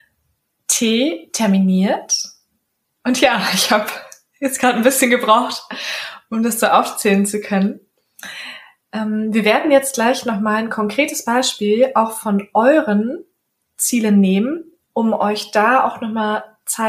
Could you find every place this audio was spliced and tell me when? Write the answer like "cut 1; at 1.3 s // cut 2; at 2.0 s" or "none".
none

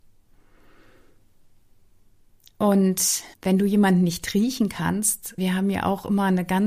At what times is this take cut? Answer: cut 1; at 3.3 s // cut 2; at 5.4 s

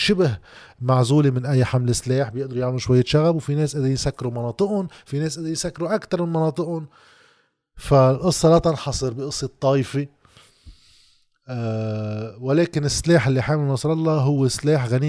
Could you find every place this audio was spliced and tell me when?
none

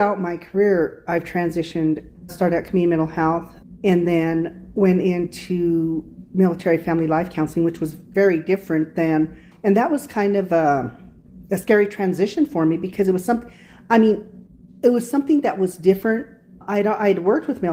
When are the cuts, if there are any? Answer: cut 1; at 2.3 s

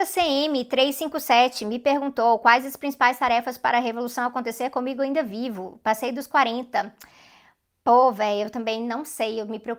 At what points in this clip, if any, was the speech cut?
none

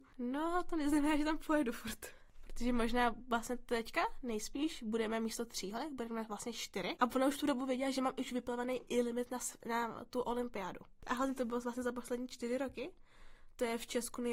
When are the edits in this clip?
cut 1; at 7.0 s // cut 2; at 11.0 s

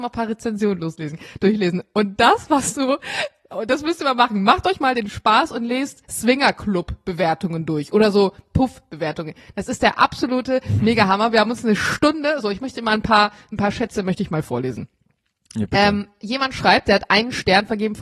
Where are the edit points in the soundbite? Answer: none

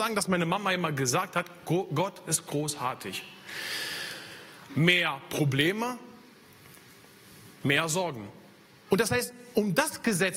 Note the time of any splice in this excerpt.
cut 1; at 4.7 s // cut 2; at 8.9 s

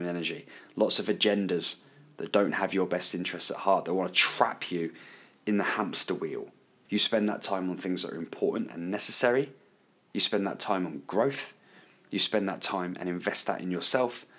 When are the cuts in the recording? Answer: cut 1; at 6.9 s

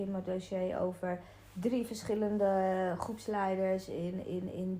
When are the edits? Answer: none

